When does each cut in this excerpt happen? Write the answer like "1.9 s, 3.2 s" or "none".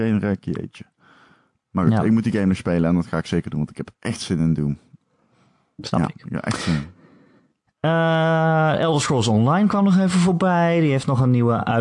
none